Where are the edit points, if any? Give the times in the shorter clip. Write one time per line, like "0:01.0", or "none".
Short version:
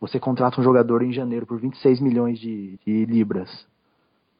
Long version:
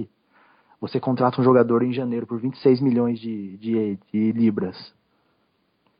0:02.8